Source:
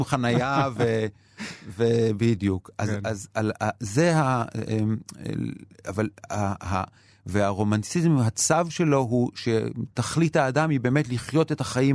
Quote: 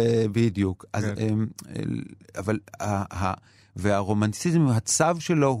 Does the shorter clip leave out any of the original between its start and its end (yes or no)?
yes